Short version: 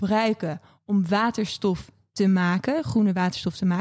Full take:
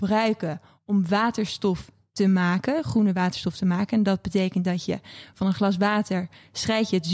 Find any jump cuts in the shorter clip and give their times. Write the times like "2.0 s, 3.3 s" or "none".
none